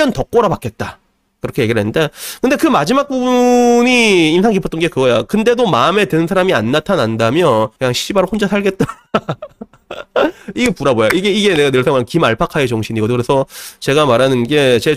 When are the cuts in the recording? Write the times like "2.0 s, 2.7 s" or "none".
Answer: 7.8 s